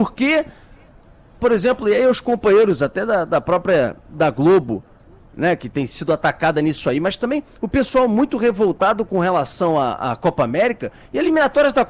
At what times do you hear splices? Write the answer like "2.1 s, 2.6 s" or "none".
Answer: none